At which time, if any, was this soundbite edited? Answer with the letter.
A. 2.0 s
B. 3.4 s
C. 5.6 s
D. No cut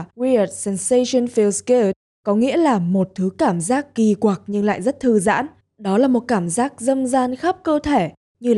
C